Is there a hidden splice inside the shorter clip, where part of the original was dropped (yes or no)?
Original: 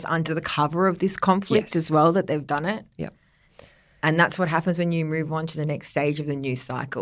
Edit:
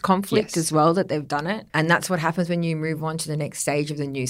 yes